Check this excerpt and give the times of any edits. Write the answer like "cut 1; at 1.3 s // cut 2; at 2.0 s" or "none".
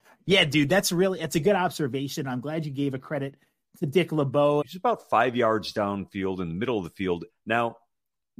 cut 1; at 4.6 s // cut 2; at 7.3 s